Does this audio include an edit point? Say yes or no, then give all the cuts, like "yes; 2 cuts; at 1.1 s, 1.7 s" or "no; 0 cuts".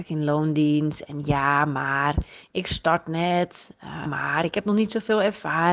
yes; 1 cut; at 4.0 s